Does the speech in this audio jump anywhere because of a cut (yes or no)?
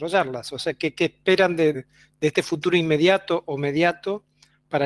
yes